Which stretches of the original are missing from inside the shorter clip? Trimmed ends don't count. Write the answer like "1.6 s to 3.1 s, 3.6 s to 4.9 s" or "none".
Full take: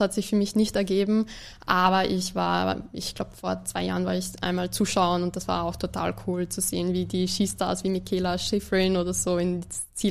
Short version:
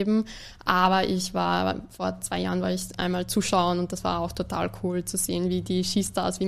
2.9 s to 3.3 s